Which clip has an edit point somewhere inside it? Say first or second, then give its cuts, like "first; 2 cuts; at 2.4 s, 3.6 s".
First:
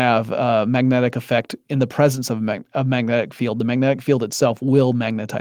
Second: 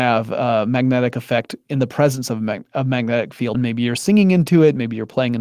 second; 1 cut; at 3.5 s